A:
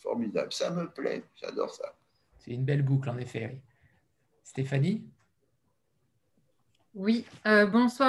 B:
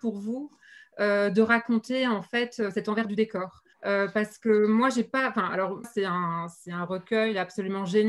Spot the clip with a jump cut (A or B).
B